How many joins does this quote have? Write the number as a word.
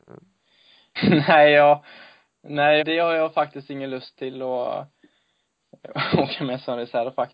two